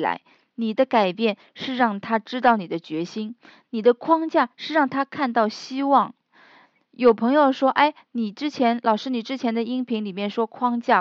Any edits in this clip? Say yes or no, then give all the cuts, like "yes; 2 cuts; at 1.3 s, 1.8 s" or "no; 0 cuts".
no; 0 cuts